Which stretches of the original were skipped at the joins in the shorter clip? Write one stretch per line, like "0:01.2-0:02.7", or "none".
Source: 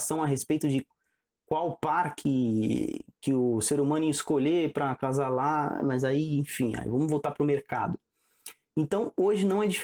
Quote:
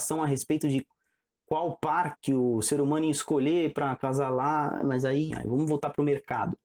0:02.2-0:03.1
0:06.3-0:06.7